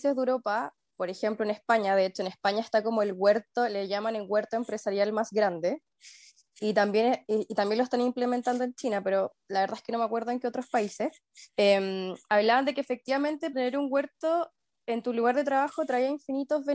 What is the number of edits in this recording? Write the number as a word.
two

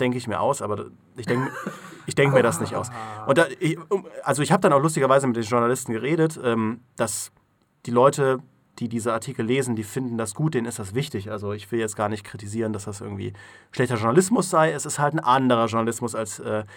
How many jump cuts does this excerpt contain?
zero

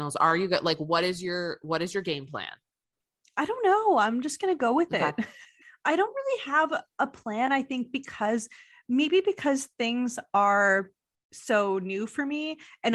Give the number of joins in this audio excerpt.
zero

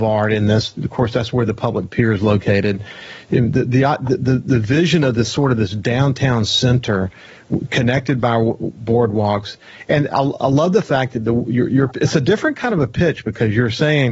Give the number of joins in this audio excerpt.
zero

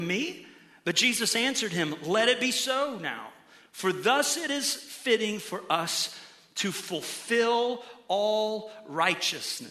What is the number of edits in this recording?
zero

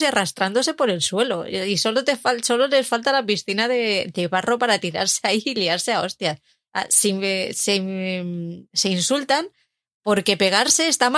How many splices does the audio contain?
zero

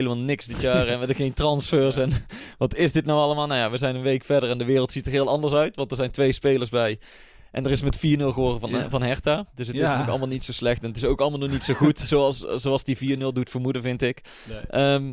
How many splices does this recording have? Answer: zero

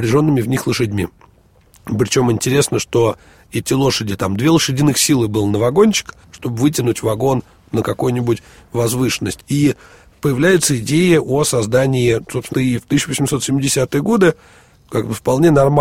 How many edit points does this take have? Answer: three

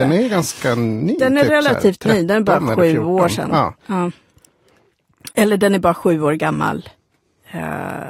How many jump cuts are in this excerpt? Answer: zero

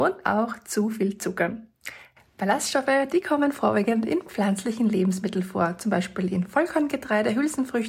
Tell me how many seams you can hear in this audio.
one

